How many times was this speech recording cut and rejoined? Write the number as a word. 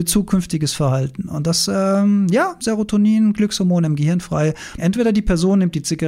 two